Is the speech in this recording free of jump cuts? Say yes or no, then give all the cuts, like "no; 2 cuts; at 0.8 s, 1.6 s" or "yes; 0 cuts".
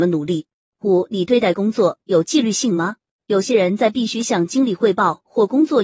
yes; 0 cuts